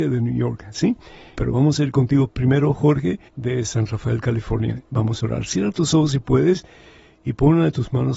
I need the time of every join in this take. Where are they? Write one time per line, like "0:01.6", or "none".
0:01.3
0:03.3